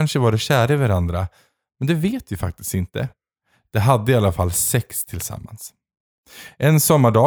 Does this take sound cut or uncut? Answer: uncut